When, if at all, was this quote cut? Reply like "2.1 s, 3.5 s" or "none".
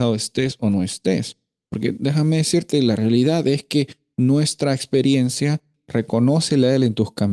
5.7 s

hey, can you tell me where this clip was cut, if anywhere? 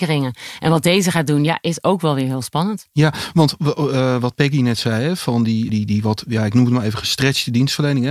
5.7 s

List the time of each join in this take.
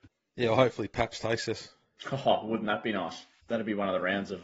none

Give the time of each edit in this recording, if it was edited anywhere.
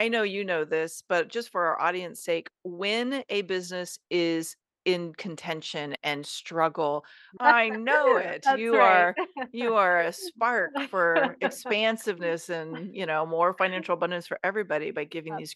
7.4 s

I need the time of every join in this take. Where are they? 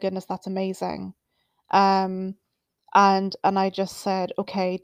none

